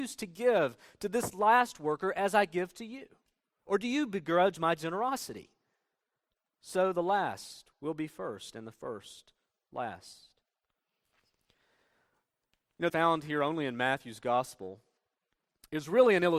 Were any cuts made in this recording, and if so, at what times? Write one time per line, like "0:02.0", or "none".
0:03.6
0:12.9